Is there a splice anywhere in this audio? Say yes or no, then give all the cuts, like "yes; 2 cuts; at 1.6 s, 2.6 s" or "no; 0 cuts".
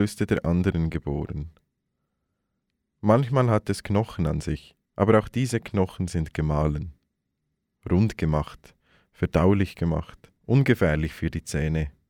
yes; 2 cuts; at 4.8 s, 10.4 s